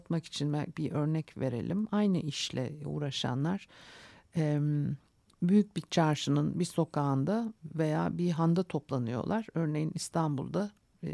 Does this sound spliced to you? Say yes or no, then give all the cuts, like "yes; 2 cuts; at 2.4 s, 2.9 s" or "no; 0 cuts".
no; 0 cuts